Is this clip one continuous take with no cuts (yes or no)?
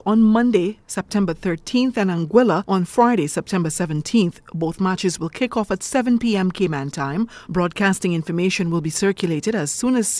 yes